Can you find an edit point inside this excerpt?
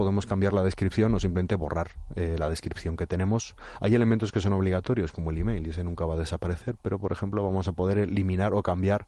no; 0 cuts

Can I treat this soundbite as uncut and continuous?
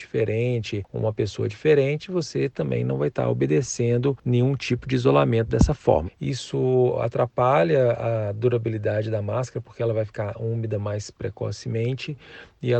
no; 1 cut; at 6.1 s

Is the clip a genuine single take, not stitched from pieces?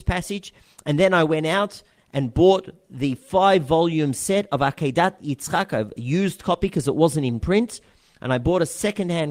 yes; 0 cuts

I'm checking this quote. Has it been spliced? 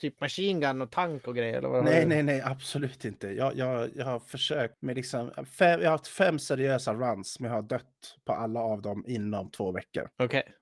no; 0 cuts

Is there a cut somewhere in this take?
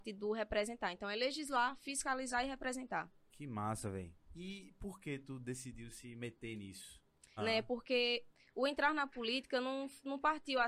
yes; 1 cut; at 7.4 s

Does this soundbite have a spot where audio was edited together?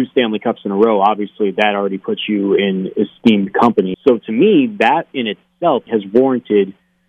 yes; 2 cuts; at 3.9 s, 5.9 s

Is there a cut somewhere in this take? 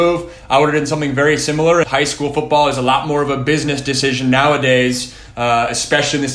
yes; 1 cut; at 1.8 s

